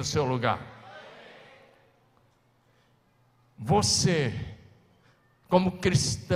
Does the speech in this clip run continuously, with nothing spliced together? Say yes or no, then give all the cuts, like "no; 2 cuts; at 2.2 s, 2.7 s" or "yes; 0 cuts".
yes; 0 cuts